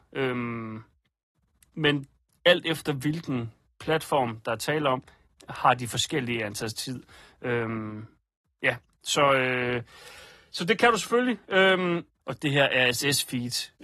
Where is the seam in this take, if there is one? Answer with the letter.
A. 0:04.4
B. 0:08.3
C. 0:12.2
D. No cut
C